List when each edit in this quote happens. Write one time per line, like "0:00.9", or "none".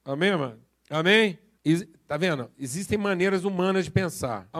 none